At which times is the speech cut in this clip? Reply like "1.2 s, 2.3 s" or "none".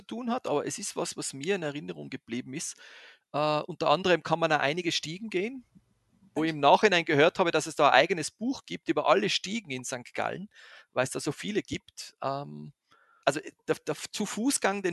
3.2 s, 6.4 s, 13.2 s